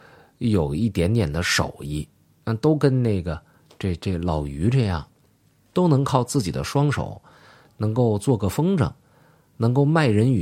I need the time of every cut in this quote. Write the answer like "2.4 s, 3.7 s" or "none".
none